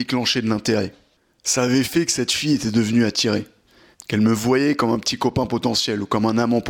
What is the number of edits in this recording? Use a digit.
1